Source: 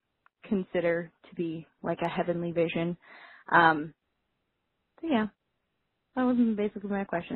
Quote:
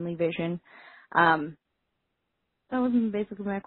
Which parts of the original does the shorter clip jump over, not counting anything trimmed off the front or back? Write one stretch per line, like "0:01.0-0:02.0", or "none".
0:04.9-0:06.0